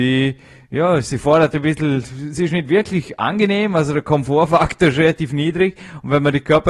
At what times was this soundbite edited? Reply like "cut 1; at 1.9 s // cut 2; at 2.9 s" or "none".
none